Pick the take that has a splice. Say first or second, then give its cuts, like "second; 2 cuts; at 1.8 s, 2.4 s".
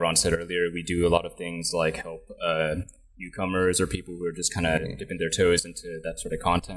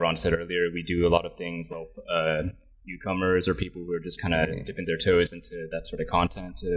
second; 1 cut; at 1.7 s